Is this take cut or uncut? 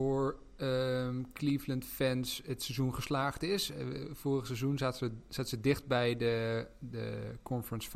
uncut